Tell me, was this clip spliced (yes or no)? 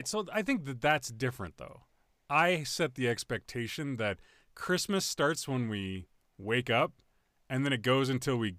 no